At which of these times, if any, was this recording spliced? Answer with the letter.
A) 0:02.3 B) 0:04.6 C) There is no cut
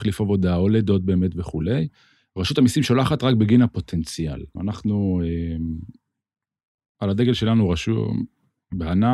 B